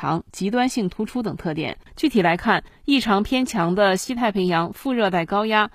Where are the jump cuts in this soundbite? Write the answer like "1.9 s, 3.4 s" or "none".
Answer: 1.9 s